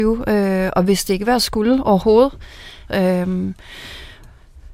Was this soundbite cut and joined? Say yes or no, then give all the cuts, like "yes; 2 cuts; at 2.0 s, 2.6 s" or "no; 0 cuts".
yes; 1 cut; at 2.9 s